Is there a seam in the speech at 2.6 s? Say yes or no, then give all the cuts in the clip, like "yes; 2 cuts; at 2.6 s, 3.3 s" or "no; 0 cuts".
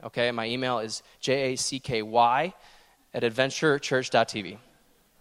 no; 0 cuts